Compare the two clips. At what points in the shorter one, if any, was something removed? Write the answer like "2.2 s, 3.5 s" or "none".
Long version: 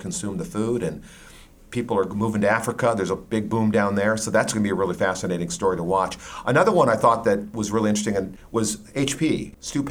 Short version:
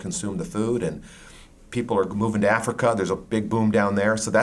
none